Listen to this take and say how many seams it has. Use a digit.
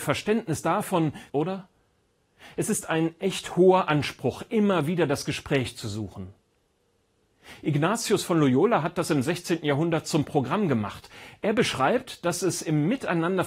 1